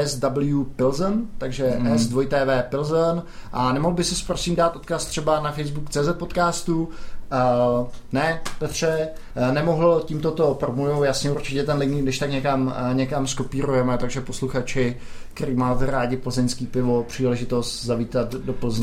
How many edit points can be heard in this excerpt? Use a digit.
0